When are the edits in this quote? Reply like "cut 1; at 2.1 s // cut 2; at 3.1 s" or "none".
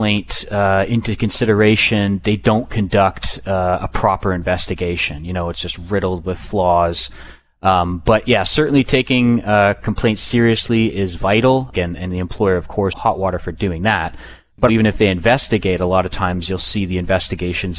cut 1; at 11.7 s // cut 2; at 12.9 s // cut 3; at 14.7 s